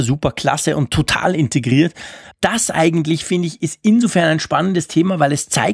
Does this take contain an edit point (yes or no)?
yes